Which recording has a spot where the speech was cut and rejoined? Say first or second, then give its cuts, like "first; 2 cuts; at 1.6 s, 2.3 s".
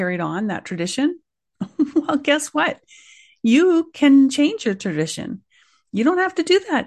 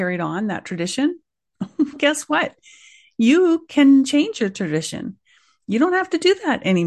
second; 1 cut; at 1.9 s